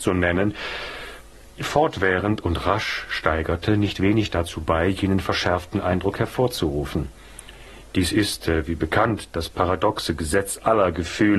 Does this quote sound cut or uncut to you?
uncut